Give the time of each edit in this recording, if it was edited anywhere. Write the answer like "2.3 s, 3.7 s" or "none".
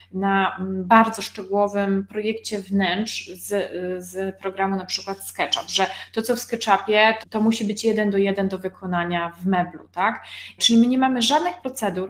7.2 s, 10.6 s